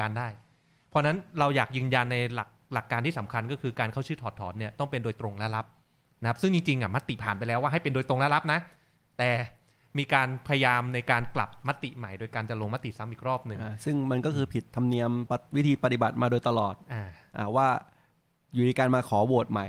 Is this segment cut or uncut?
cut